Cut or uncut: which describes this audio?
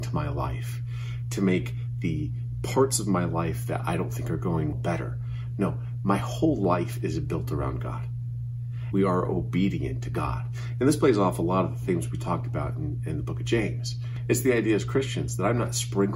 cut